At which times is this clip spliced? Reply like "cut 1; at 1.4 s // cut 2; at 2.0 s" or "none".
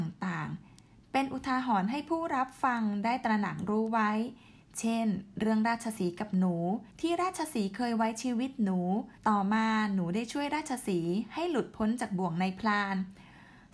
cut 1; at 6.9 s // cut 2; at 9.2 s